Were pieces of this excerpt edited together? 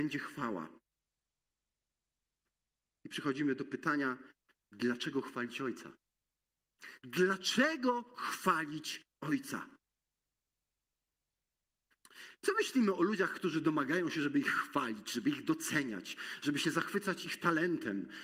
no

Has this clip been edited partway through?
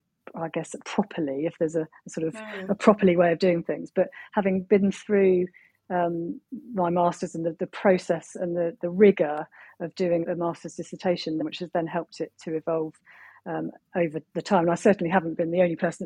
yes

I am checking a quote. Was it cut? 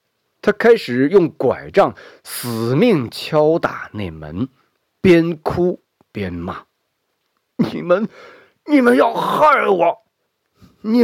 no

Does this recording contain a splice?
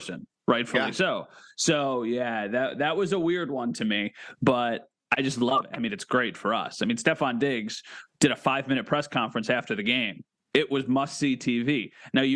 no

